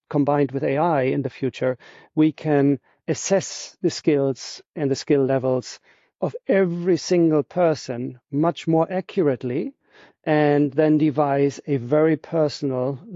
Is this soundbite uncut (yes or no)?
yes